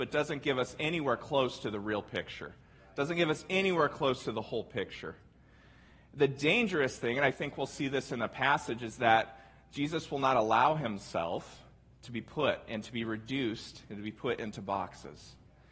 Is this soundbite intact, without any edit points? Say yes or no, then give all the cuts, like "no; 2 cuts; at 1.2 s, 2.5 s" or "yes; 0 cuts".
yes; 0 cuts